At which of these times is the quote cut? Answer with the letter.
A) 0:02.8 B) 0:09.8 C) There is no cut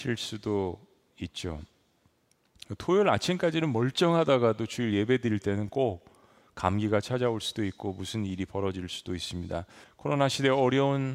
B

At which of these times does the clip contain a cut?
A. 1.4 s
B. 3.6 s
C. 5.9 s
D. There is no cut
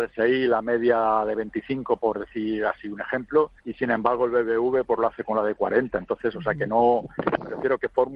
B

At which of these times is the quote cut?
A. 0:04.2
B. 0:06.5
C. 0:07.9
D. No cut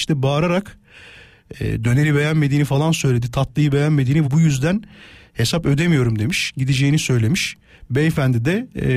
A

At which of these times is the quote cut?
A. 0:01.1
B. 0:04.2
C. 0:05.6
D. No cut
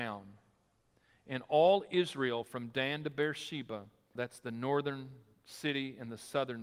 B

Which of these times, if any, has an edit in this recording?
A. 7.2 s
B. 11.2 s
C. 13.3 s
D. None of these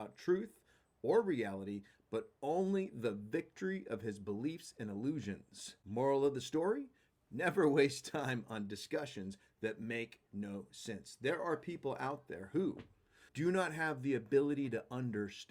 C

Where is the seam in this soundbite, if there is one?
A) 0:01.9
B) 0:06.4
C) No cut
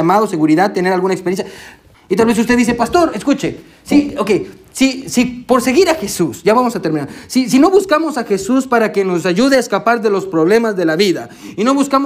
A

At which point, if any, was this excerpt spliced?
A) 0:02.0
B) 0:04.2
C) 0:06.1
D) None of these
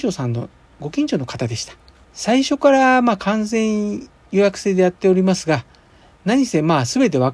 A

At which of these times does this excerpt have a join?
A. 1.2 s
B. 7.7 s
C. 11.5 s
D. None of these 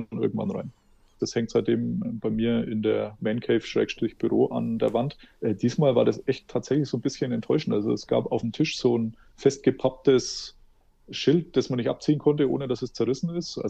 A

